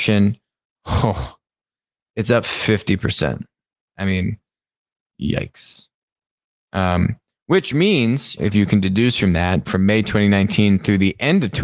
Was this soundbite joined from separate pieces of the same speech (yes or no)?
yes